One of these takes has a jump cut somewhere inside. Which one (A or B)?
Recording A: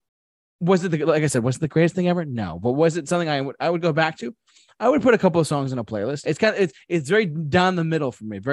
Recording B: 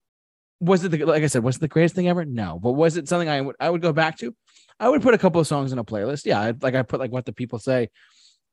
A